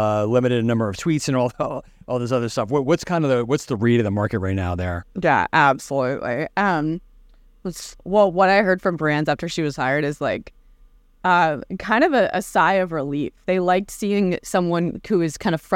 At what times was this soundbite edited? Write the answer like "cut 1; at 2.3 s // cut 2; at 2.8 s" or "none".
none